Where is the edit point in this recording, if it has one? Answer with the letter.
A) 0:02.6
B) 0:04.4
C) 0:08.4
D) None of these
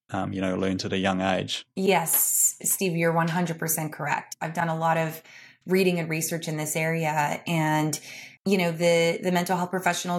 C